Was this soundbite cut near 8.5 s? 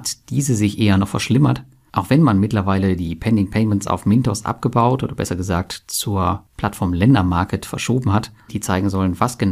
yes; 1 cut; at 8.5 s

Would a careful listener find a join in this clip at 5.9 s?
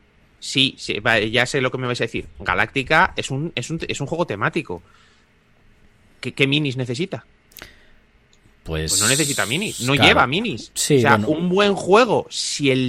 no; 0 cuts

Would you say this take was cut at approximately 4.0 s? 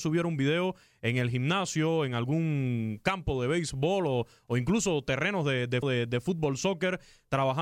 no; 1 cut; at 5.8 s

